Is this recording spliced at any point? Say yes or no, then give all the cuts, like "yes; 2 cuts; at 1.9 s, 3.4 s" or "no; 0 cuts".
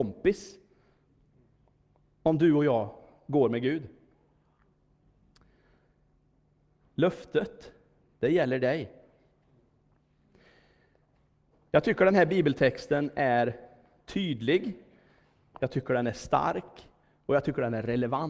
no; 0 cuts